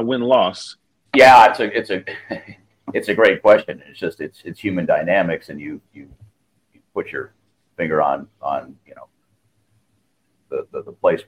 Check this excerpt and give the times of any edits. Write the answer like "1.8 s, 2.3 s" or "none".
1.0 s